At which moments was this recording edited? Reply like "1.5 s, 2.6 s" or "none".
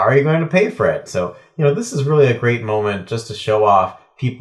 1.1 s